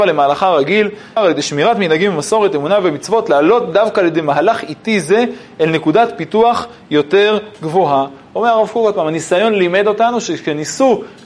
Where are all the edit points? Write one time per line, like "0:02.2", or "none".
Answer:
0:01.2